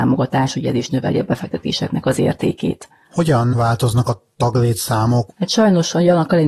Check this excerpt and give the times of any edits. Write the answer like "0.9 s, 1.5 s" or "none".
5.3 s